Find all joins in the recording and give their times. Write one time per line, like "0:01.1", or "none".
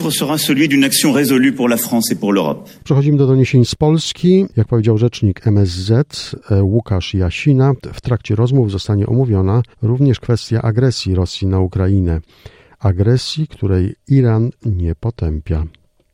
0:02.8
0:04.5
0:09.7